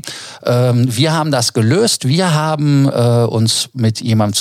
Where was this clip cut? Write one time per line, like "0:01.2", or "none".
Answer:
none